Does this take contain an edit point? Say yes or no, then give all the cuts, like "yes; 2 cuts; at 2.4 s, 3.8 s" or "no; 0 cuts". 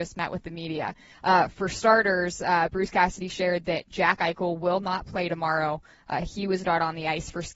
no; 0 cuts